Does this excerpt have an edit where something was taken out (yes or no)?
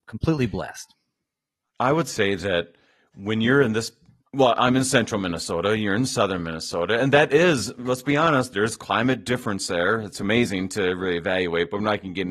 no